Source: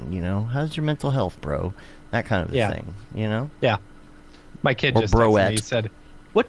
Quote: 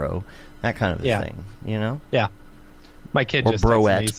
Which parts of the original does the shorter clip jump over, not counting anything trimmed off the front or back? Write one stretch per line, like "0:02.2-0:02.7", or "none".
none